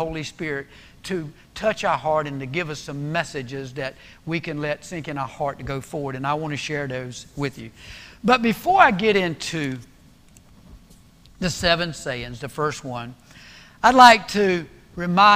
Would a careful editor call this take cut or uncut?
uncut